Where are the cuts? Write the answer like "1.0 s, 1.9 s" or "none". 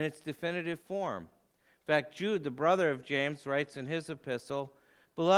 none

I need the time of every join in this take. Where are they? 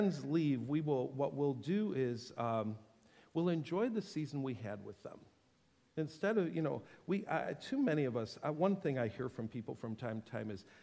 none

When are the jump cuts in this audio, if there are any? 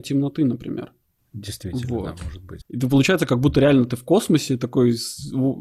2.6 s

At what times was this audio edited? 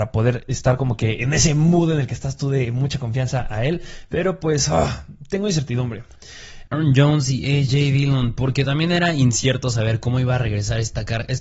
6.7 s

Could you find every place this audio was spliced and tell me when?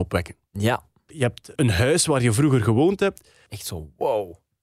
1.6 s, 3.5 s

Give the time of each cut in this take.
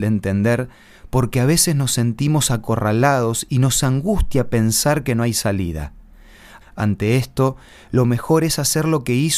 6.6 s

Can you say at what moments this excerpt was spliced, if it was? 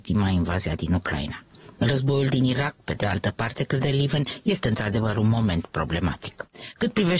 none

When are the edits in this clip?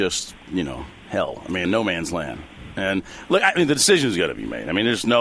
1.6 s

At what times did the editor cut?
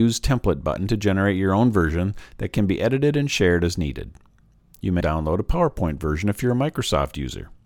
5.0 s

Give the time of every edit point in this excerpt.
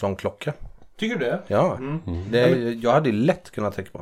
none

